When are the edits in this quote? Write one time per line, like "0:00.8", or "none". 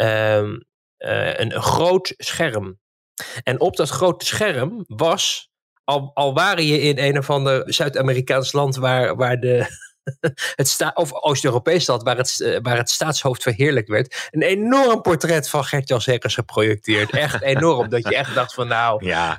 0:07.6